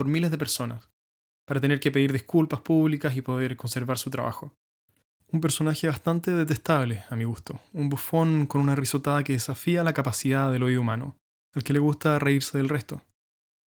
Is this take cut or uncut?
cut